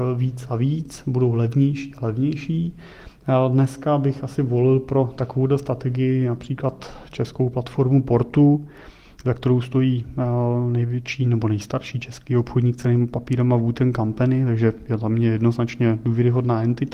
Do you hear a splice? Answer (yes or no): no